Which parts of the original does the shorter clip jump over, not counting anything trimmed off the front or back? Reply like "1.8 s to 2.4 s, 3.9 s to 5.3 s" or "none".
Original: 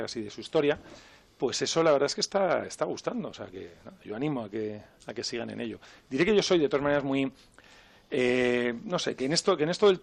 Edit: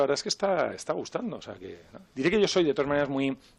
4.0 s to 6.0 s